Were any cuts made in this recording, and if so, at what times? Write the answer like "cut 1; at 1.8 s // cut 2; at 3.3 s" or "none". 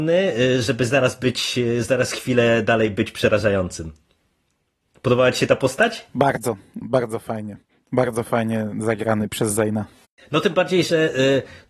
cut 1; at 6.8 s

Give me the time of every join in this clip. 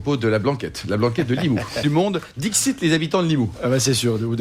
cut 1; at 1.8 s

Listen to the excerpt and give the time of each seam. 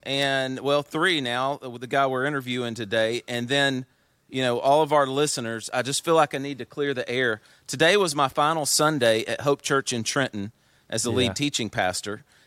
none

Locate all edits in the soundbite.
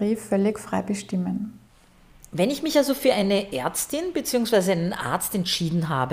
none

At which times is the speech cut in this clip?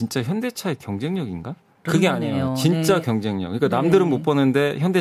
cut 1; at 1.9 s

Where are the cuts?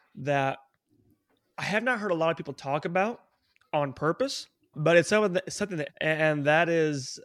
cut 1; at 4.7 s // cut 2; at 5.9 s

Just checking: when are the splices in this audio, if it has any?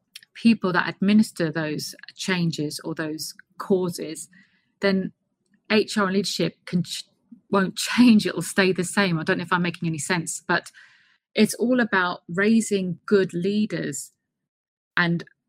none

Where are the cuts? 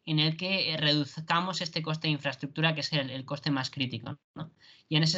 none

